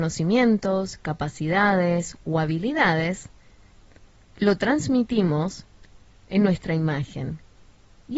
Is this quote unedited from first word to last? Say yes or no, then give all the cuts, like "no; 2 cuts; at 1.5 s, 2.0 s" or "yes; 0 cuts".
yes; 0 cuts